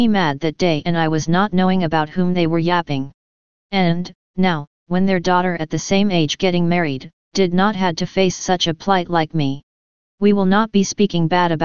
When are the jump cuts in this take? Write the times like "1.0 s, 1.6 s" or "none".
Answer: none